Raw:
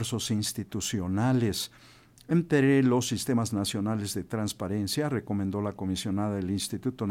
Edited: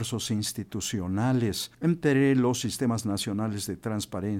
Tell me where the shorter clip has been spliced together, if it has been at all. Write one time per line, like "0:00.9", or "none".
0:01.7